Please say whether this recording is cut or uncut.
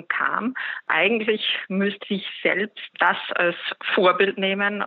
cut